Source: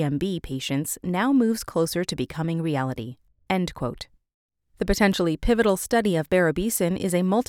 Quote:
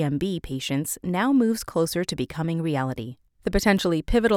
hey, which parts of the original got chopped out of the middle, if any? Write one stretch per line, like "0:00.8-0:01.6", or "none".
0:03.3-0:04.6